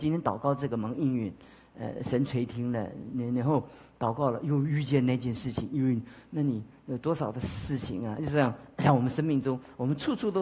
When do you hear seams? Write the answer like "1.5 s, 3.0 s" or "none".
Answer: none